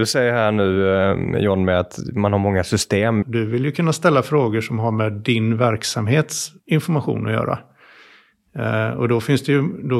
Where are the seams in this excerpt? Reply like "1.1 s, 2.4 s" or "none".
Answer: 3.2 s, 6.6 s